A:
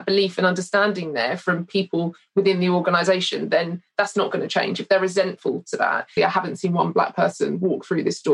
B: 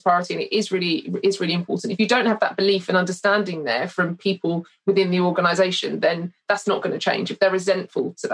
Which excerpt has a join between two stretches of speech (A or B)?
A